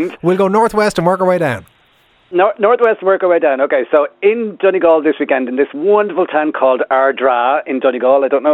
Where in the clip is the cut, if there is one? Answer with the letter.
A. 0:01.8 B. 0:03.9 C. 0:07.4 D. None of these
D